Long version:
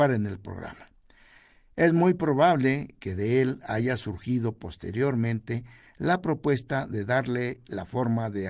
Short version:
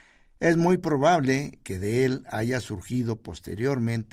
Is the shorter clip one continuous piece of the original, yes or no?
yes